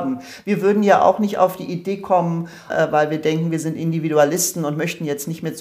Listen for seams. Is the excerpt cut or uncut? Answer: cut